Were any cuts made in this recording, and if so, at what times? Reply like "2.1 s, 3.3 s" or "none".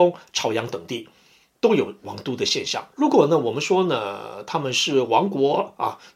2.9 s